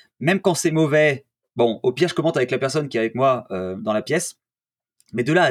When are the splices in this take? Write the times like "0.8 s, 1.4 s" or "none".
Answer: none